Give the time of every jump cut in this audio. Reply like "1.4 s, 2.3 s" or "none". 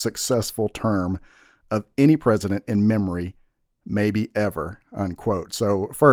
none